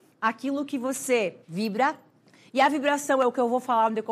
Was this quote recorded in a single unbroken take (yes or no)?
no